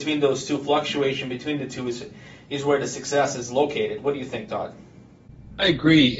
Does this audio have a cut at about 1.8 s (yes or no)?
no